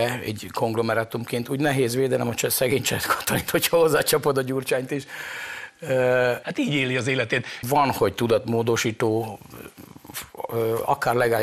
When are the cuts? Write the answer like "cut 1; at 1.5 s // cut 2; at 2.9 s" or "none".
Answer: cut 1; at 6.4 s // cut 2; at 7.6 s